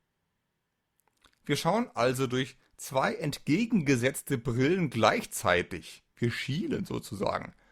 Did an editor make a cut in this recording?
no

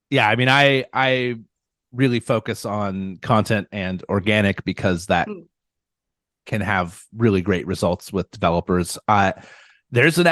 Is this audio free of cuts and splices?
yes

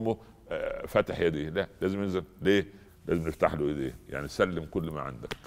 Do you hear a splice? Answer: yes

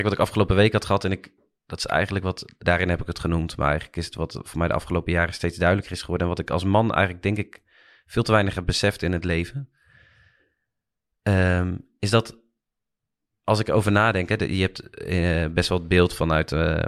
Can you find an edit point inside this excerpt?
yes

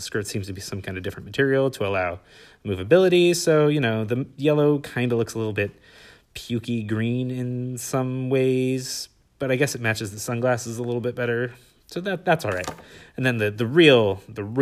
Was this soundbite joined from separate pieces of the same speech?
no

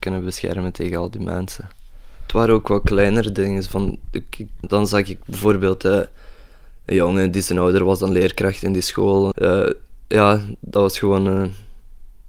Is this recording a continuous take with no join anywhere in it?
no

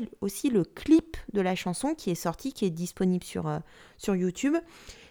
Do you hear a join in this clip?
no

